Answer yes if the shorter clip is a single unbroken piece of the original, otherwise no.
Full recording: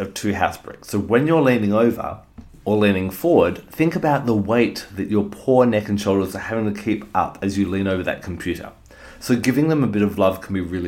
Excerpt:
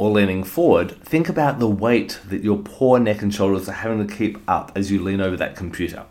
yes